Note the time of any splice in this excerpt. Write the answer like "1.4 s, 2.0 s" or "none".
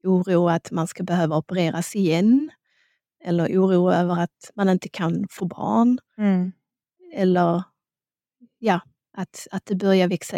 none